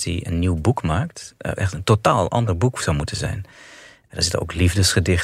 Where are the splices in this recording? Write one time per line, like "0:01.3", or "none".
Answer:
0:01.6